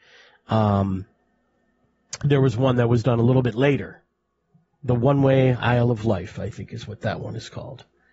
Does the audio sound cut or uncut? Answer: uncut